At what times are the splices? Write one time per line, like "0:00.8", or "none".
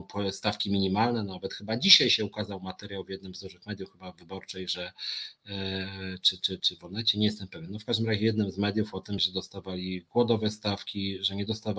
0:06.6
0:09.2

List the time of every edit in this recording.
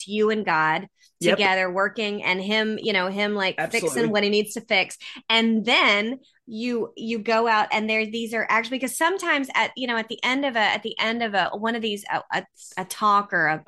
none

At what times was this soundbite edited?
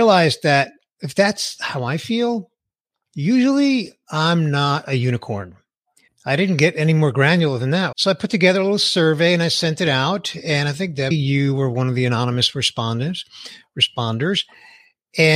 0:06.1
0:07.9
0:11.1

